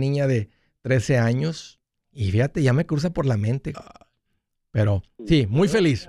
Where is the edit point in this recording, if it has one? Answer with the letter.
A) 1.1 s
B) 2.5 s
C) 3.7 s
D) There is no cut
C